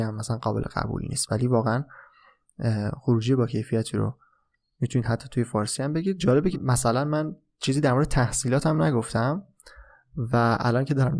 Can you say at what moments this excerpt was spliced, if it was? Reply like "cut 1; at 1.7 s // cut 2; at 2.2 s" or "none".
cut 1; at 6.5 s